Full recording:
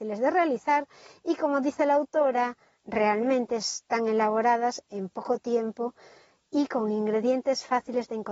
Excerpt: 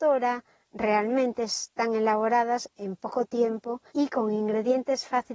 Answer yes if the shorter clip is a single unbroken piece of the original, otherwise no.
no